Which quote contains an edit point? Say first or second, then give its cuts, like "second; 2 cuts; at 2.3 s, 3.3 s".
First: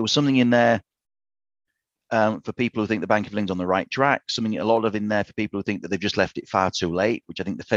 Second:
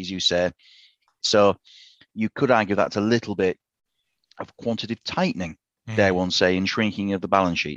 second; 1 cut; at 1.2 s